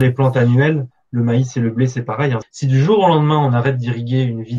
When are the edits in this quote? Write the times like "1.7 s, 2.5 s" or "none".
2.4 s

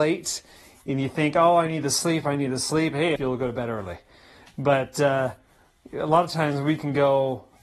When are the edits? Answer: 3.2 s

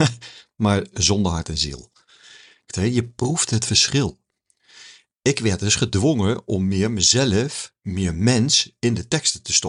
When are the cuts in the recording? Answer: 2.7 s

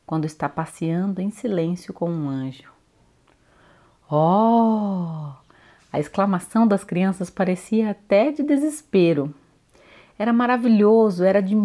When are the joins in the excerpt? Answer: none

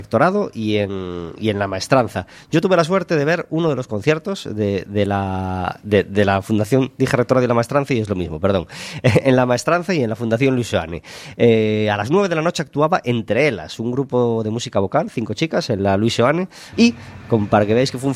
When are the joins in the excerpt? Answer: 16.7 s

